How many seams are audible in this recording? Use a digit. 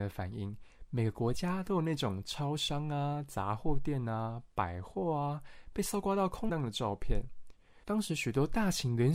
2